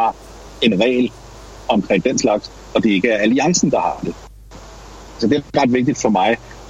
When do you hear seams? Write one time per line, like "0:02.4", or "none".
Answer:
0:05.2